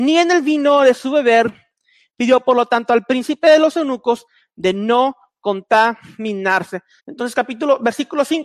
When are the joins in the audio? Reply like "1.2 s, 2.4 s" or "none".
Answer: 7.0 s